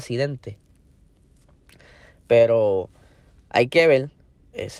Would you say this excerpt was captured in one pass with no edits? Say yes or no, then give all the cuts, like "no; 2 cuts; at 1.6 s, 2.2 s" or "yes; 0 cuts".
yes; 0 cuts